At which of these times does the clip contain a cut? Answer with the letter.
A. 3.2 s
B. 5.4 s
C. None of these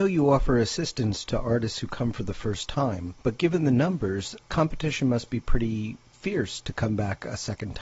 A